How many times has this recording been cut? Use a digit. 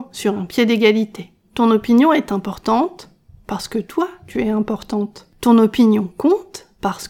0